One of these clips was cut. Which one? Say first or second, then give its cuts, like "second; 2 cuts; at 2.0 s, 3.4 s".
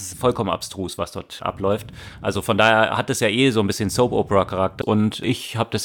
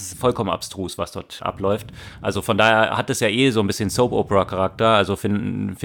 first; 1 cut; at 4.8 s